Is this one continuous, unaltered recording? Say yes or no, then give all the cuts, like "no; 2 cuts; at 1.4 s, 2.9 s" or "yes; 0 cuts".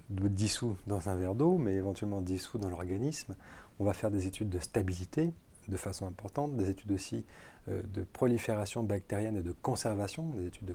yes; 0 cuts